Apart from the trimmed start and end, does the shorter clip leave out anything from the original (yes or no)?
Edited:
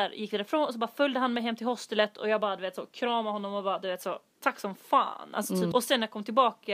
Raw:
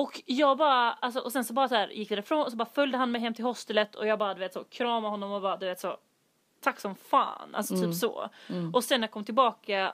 yes